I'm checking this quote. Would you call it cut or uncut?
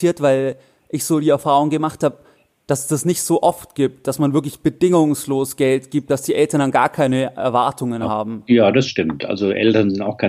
uncut